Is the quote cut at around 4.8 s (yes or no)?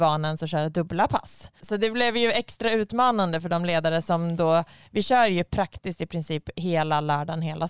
no